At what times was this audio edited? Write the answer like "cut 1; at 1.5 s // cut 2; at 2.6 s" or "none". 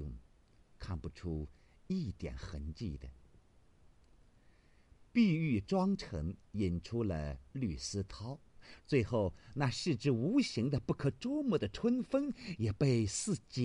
cut 1; at 8.8 s